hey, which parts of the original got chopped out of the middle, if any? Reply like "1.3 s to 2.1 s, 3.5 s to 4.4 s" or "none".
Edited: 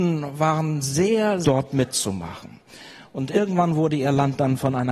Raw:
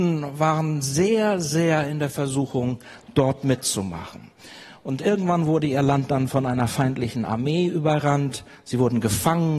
1.4 s to 3.1 s

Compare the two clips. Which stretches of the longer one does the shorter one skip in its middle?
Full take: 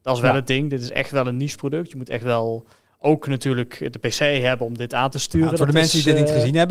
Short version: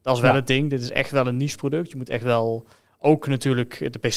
none

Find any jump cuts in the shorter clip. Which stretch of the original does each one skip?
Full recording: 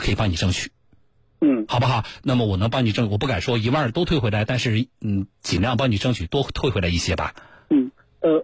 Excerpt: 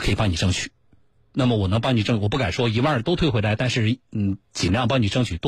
1.3 s to 2.2 s

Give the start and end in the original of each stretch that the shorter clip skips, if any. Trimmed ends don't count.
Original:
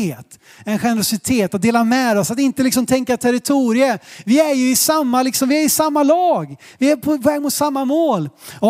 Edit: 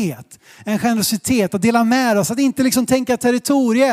none

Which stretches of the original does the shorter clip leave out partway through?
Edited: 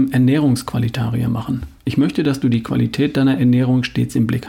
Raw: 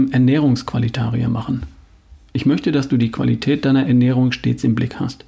1.8 s to 2.3 s

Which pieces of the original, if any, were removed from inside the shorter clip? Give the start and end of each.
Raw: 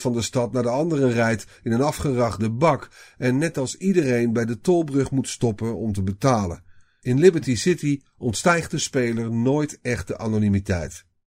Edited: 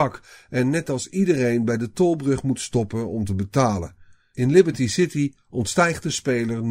none

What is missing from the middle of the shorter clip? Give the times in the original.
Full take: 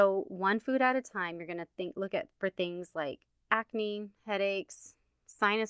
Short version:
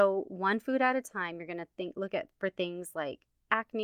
none

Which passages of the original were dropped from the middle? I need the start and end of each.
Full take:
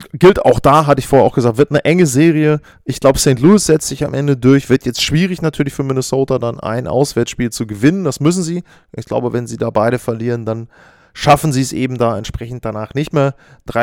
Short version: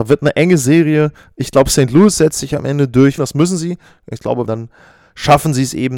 4.7 s to 8.0 s, 9.3 s to 10.4 s

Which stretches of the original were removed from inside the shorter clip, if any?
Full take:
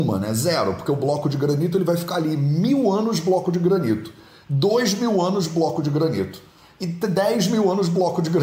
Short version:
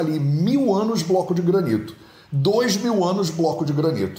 none

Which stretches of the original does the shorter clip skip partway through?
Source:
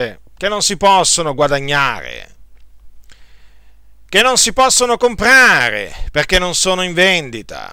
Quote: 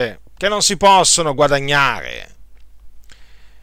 none

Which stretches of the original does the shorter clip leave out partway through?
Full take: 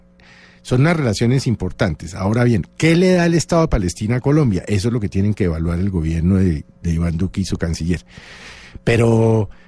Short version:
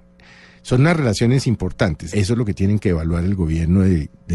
2.1 s to 4.7 s

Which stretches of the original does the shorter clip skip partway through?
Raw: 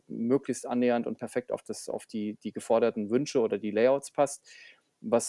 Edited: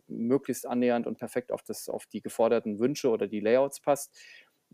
2.1 s to 2.4 s

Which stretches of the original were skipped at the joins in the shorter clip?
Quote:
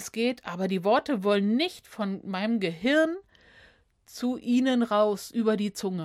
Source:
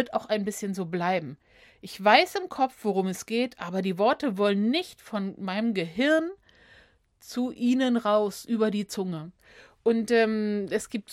none

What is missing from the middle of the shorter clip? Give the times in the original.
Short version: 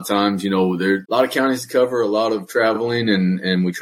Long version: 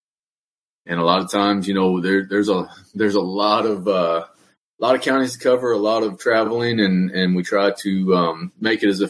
2.3 s to 4.7 s

